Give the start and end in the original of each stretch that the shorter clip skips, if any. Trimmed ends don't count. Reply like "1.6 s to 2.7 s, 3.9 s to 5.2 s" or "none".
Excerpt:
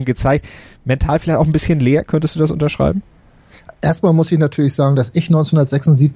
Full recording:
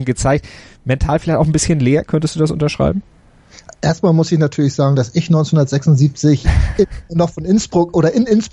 none